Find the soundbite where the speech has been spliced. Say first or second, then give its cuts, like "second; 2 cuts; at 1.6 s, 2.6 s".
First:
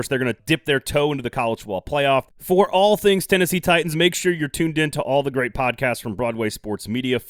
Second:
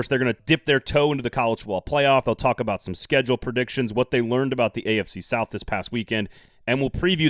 first; 2 cuts; at 2.3 s, 3.9 s